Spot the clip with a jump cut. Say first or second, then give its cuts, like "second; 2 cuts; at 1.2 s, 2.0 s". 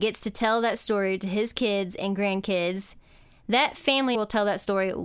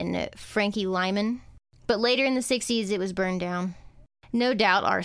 first; 1 cut; at 4.1 s